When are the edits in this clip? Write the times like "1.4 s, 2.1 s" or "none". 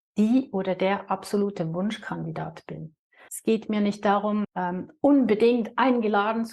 3.3 s, 4.4 s